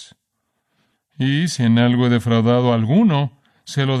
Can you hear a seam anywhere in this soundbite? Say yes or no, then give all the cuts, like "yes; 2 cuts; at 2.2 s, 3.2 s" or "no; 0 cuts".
no; 0 cuts